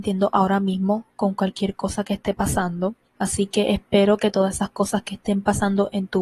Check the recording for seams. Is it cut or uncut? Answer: cut